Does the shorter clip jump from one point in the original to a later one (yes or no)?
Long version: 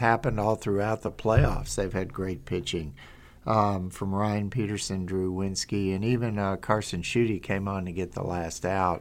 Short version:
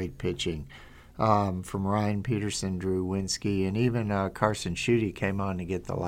no